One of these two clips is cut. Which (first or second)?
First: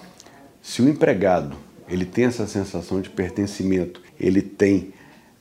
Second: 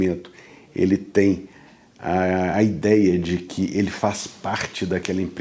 first